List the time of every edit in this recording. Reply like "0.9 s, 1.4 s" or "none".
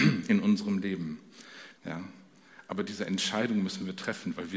1.8 s

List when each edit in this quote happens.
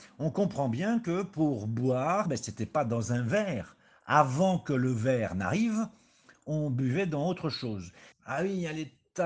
2.3 s, 8.1 s

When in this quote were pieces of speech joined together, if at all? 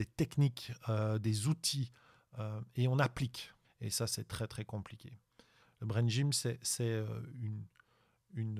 3.6 s, 5.6 s

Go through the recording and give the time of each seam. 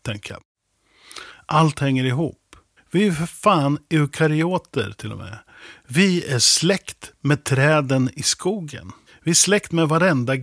none

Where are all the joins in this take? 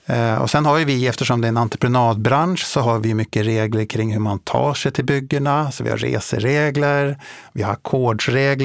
none

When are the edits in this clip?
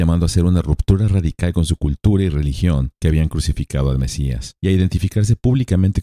2.9 s, 4.6 s

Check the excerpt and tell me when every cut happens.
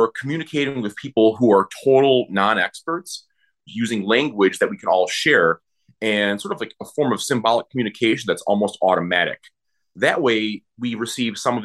3.7 s

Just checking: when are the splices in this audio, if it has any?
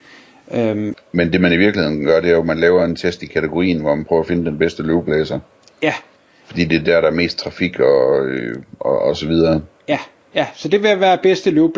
0.9 s

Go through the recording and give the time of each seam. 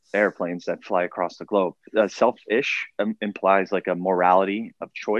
1.9 s

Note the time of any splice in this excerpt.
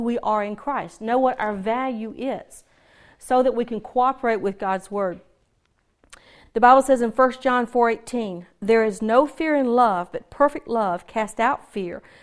none

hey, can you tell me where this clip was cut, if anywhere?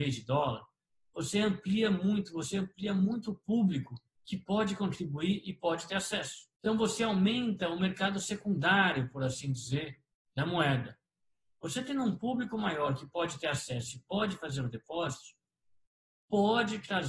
6.6 s

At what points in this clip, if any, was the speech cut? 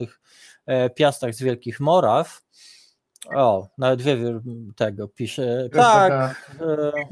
5.7 s

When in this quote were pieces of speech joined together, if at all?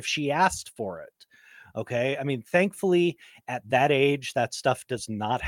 none

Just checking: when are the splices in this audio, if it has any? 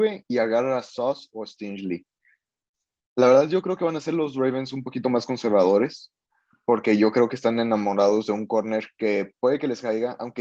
none

